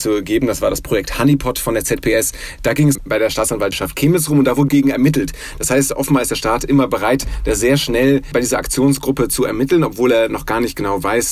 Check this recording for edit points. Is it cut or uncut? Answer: uncut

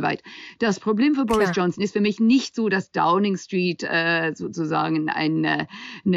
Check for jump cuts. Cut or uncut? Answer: uncut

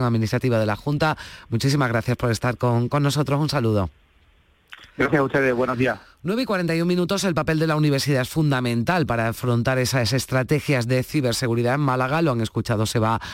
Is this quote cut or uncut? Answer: uncut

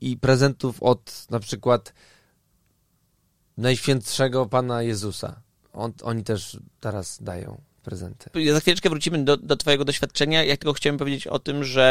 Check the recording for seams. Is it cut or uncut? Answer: uncut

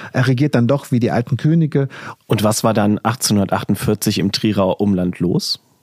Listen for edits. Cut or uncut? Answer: cut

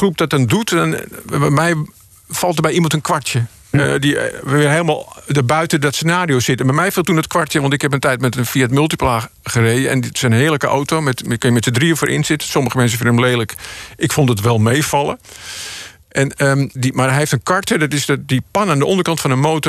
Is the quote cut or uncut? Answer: cut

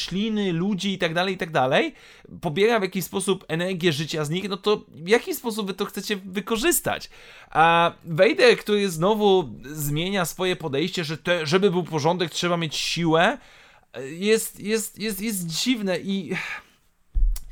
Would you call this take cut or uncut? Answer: uncut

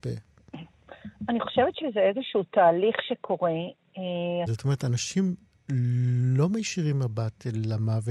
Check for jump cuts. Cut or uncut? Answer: cut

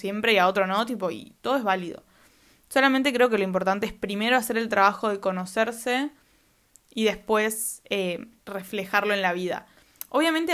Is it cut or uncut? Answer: uncut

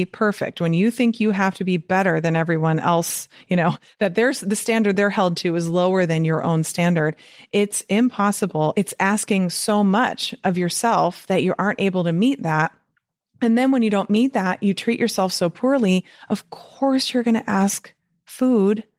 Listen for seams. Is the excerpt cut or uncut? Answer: uncut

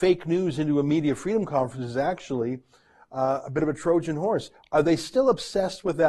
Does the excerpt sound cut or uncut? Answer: uncut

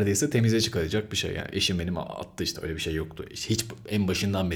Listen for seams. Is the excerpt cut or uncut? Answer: uncut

